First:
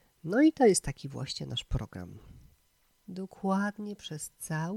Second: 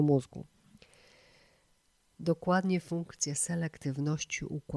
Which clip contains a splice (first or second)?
first